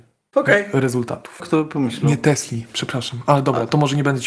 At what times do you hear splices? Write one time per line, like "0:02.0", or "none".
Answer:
0:01.4